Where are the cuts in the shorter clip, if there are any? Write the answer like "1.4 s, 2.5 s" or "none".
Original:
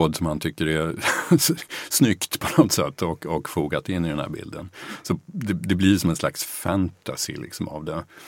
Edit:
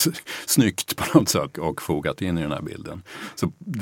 1.5 s

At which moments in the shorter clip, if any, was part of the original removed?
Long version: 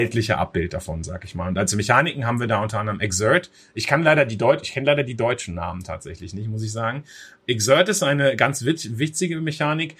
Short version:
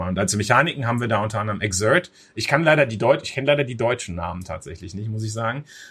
none

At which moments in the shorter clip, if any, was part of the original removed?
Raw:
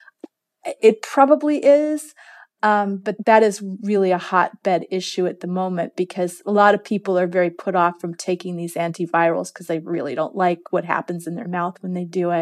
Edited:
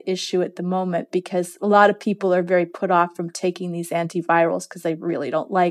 none

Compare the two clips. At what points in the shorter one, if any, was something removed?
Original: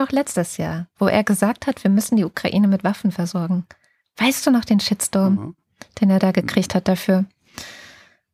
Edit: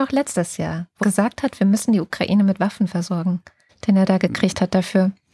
1.0 s, 3.7 s

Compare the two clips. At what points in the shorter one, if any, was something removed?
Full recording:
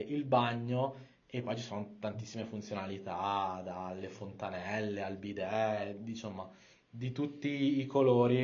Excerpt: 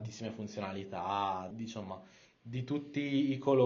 1.5 s

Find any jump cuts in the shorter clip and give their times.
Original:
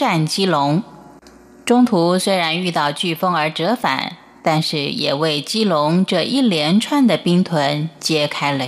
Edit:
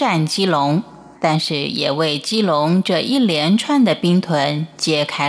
1.1 s

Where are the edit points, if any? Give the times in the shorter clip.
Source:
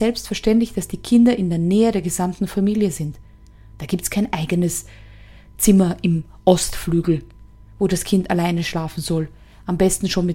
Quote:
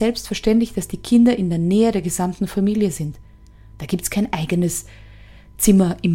none

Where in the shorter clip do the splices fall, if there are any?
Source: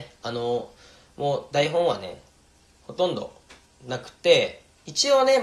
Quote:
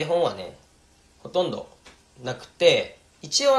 none

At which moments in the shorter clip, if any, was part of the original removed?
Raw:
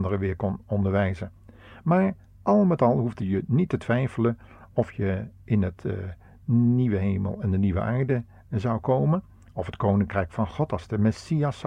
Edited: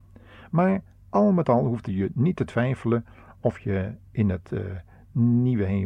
none

